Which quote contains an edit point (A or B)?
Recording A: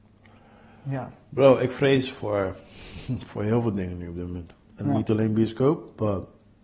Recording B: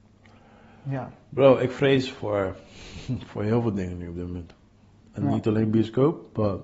A